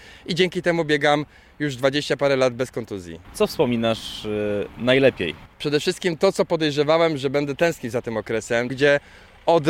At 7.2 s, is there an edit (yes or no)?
no